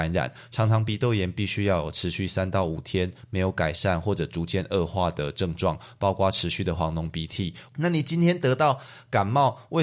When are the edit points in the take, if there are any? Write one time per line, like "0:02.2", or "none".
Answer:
0:07.7